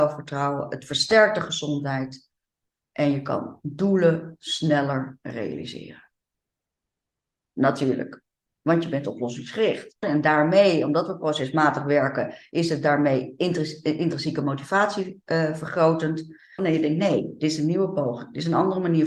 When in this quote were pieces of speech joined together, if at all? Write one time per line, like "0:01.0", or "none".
0:10.0
0:16.6